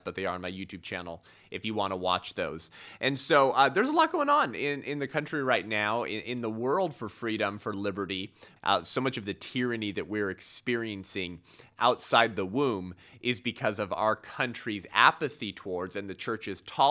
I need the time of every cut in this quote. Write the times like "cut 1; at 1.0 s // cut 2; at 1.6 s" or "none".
cut 1; at 8.6 s